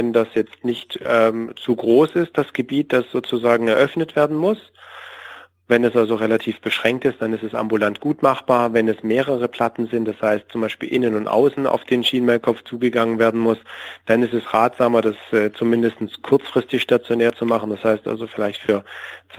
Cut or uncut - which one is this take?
uncut